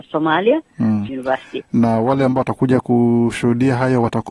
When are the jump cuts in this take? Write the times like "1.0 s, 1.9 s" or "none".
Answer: 1.1 s